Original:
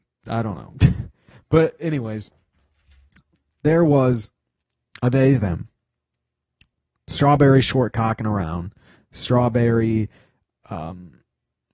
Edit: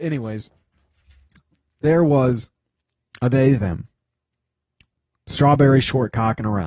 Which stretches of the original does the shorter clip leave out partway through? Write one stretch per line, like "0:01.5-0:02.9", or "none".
none